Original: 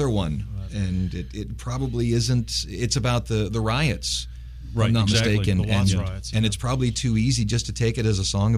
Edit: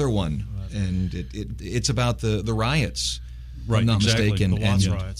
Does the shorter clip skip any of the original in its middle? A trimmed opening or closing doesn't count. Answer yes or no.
yes